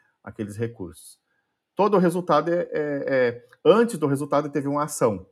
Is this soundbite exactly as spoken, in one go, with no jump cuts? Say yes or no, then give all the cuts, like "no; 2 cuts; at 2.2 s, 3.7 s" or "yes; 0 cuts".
no; 1 cut; at 1.6 s